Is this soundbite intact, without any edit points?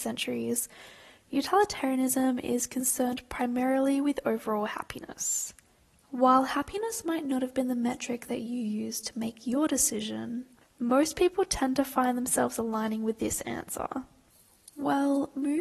no; 1 cut; at 6.0 s

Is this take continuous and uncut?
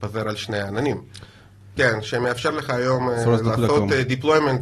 no; 1 cut; at 1.8 s

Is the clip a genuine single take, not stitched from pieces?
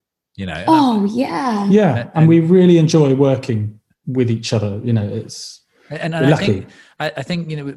yes; 0 cuts

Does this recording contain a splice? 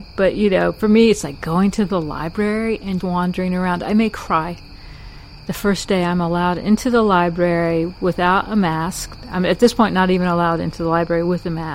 yes; 1 cut; at 3.0 s

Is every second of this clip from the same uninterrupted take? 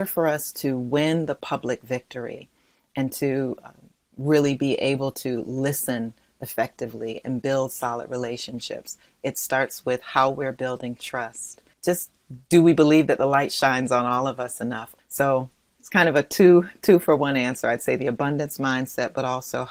no; 2 cuts; at 11.7 s, 15.0 s

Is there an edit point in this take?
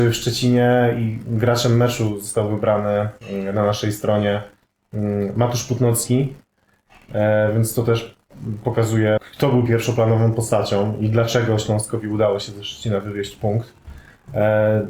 yes; 1 cut; at 9.2 s

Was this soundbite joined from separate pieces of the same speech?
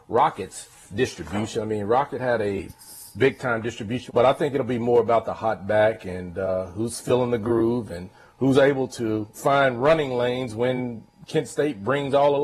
yes; 2 cuts; at 4.1 s, 9.3 s

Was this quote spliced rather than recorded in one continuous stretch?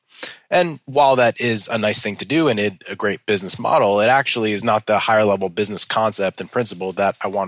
no; 0 cuts

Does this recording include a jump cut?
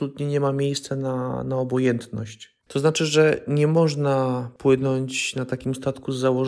yes; 1 cut; at 2.6 s

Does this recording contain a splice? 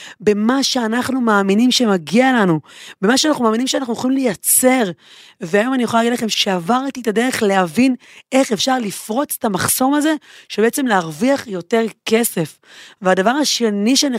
no; 0 cuts

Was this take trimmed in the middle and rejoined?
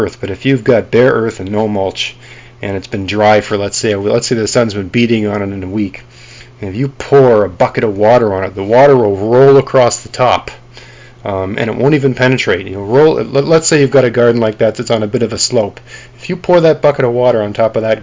no; 0 cuts

